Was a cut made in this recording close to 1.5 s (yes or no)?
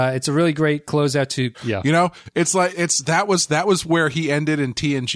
yes